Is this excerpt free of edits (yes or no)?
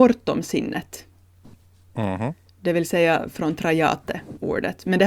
yes